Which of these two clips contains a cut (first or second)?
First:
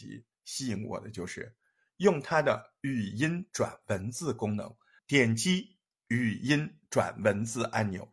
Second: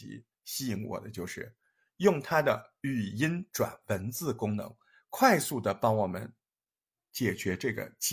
first